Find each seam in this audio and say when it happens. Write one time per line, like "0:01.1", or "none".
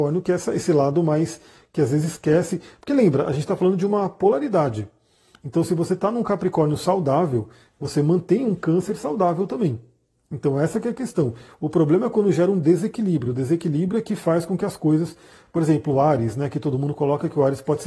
none